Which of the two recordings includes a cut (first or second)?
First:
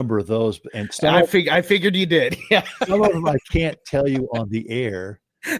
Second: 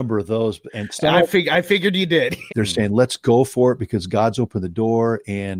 second